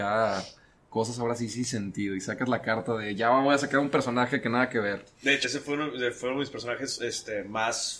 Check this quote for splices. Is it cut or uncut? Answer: cut